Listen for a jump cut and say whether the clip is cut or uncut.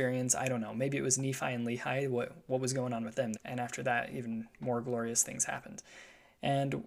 cut